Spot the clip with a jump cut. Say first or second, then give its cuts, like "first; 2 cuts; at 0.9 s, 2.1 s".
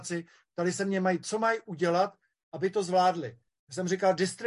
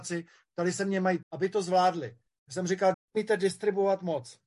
second; 2 cuts; at 1.2 s, 2.9 s